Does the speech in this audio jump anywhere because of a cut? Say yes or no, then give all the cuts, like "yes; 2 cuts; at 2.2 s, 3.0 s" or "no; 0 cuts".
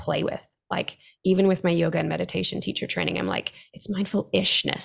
no; 0 cuts